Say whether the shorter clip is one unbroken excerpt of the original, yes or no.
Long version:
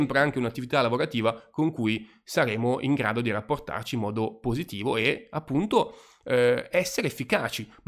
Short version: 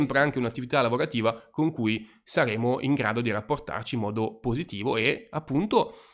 yes